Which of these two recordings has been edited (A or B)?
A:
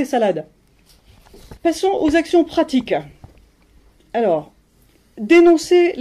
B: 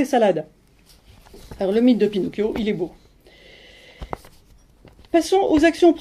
A